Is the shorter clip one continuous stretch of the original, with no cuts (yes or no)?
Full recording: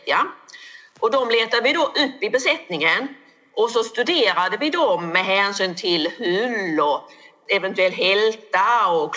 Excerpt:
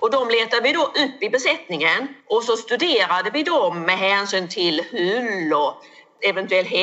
no